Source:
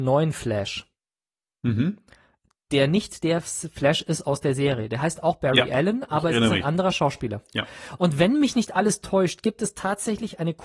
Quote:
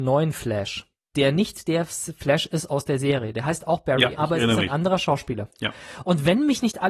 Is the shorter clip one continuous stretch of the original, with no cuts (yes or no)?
no